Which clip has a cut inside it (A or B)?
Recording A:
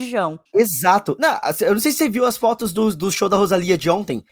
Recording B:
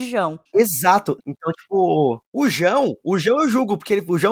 B